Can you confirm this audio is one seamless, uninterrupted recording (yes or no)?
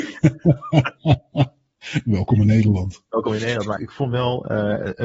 no